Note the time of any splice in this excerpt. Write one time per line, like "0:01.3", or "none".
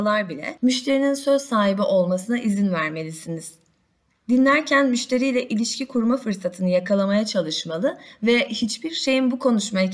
none